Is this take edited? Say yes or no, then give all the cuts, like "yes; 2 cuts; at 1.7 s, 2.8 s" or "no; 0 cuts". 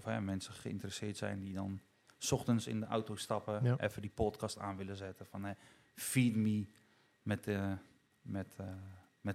no; 0 cuts